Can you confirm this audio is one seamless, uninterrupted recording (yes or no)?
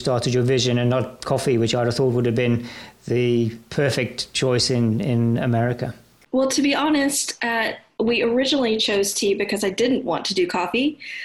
yes